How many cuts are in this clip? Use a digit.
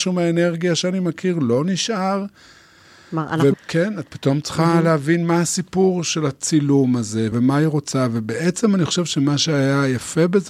2